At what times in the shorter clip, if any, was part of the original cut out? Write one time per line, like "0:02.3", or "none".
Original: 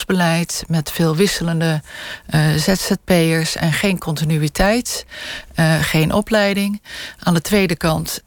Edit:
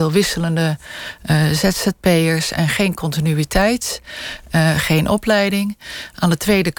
none